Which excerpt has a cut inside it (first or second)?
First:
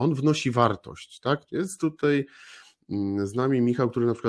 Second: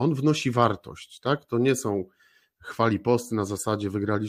first